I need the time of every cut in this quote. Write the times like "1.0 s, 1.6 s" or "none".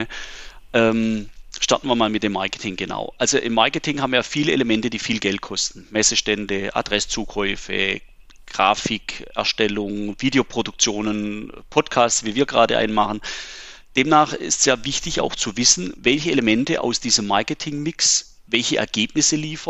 none